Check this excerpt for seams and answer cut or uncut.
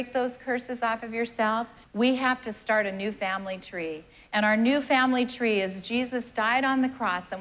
cut